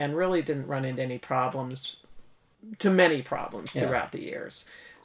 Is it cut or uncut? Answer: uncut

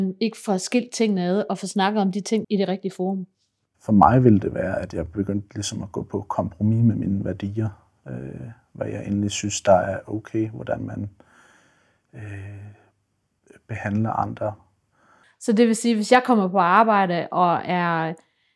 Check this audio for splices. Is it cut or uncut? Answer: cut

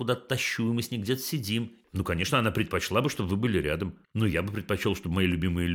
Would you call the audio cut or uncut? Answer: cut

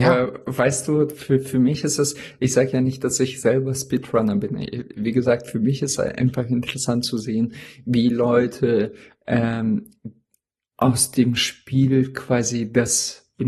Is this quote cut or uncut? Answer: uncut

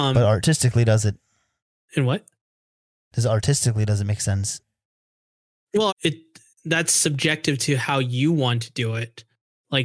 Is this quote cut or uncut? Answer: cut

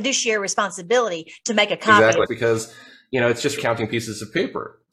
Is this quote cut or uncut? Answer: cut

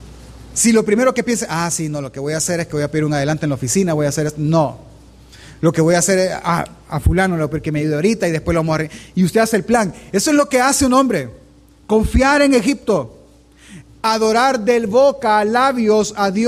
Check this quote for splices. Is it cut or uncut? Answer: uncut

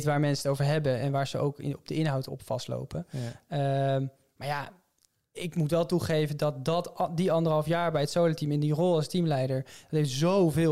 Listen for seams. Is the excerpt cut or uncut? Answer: cut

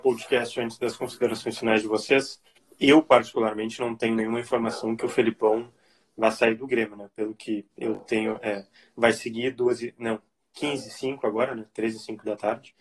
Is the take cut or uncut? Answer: uncut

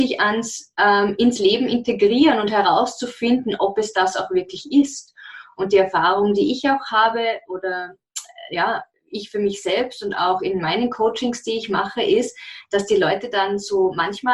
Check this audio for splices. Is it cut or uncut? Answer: uncut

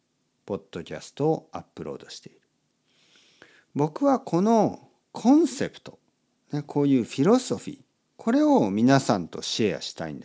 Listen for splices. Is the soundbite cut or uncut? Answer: uncut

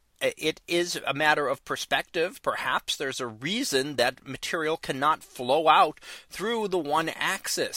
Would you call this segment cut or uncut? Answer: uncut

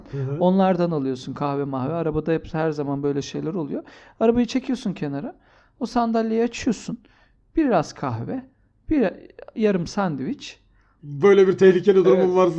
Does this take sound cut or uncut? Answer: cut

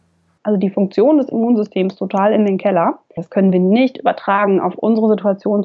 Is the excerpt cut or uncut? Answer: cut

